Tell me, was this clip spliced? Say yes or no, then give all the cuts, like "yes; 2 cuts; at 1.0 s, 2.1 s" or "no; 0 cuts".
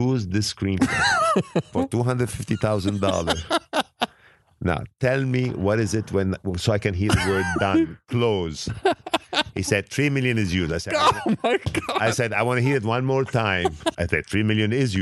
yes; 1 cut; at 13.9 s